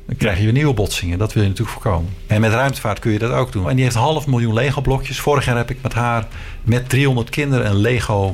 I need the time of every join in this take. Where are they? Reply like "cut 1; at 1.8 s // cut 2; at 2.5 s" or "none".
cut 1; at 2.3 s // cut 2; at 3.6 s